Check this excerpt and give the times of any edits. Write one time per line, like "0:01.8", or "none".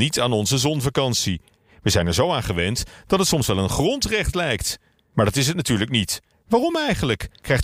0:06.3